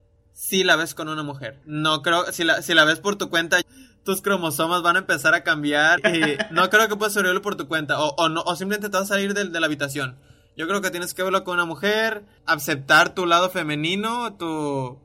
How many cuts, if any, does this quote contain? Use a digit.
3